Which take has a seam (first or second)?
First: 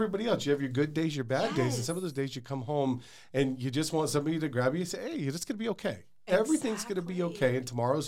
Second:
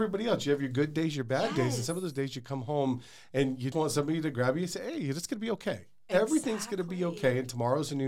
second